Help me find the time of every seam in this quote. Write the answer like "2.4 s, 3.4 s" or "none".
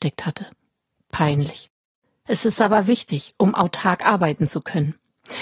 2.3 s